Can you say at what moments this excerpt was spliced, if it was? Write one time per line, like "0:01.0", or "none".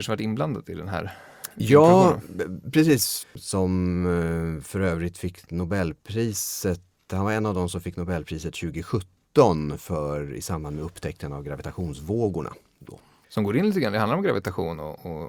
0:03.2

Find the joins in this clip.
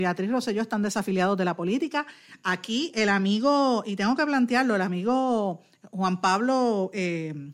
none

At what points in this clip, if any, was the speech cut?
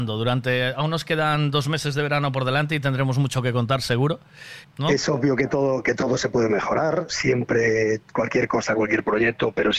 0:04.6

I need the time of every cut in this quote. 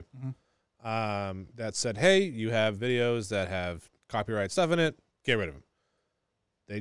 none

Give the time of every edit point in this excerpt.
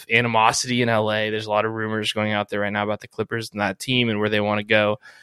none

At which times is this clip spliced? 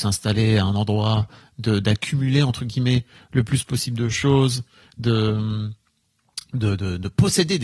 none

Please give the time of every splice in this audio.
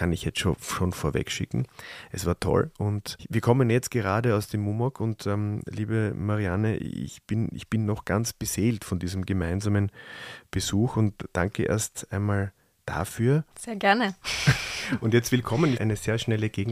0:13.5
0:15.7

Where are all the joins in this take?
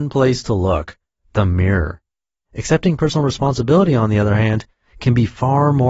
0:02.5

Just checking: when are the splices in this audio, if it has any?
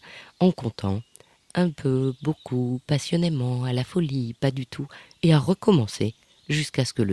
none

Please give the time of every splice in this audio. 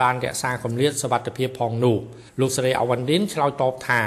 0:02.3

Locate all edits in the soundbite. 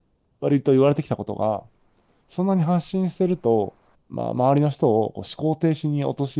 0:03.9

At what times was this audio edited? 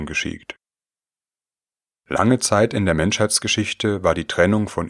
0:01.9

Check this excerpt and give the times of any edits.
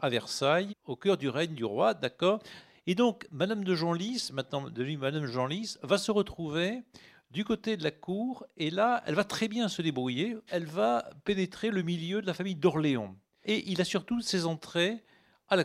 0:10.5
0:13.4

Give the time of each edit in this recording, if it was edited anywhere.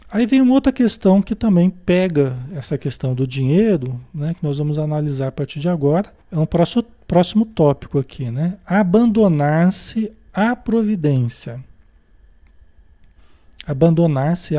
0:06.2

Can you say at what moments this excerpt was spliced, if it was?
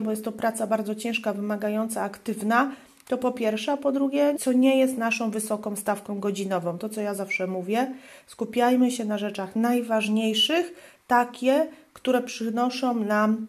0:04.4

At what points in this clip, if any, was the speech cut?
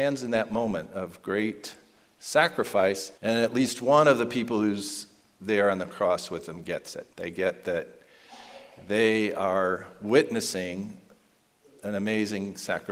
0:03.2
0:07.1

